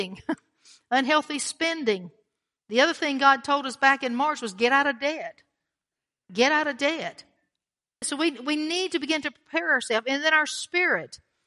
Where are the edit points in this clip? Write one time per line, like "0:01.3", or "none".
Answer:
0:08.0